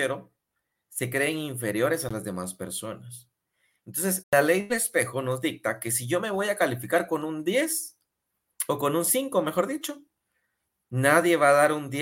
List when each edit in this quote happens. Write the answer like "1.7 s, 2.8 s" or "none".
4.2 s